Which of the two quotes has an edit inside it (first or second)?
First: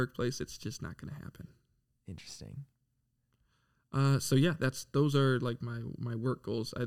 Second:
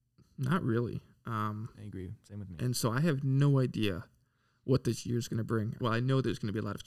second